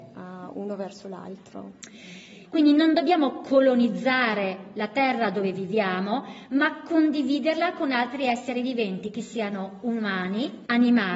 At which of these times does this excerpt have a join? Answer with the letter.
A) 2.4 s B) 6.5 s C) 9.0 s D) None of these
A